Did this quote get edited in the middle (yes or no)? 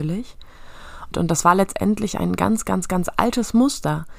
yes